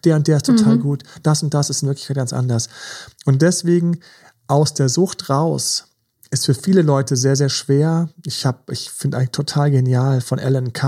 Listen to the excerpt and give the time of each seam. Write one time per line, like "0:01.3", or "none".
none